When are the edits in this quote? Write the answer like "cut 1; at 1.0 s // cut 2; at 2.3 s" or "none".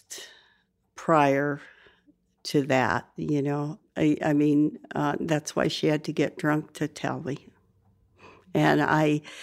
cut 1; at 3.8 s